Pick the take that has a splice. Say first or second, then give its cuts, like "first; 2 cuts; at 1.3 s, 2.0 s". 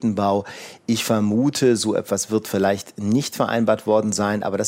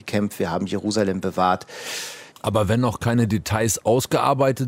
second; 1 cut; at 2.3 s